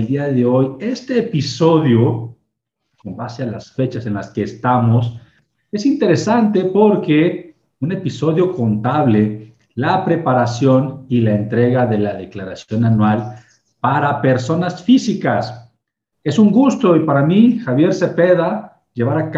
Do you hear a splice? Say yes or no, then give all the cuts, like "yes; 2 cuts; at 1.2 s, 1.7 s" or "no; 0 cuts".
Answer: yes; 1 cut; at 16.1 s